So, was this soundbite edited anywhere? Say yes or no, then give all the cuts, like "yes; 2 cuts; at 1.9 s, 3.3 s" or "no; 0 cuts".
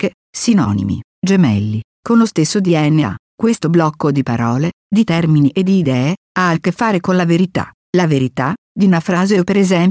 no; 0 cuts